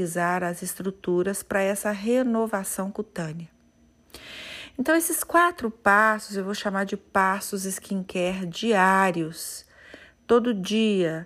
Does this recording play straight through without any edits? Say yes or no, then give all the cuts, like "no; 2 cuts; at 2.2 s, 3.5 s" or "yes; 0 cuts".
yes; 0 cuts